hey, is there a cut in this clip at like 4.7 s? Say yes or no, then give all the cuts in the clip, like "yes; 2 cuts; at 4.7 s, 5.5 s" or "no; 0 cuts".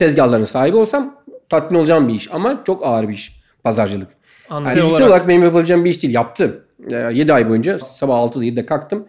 yes; 2 cuts; at 4.7 s, 7.8 s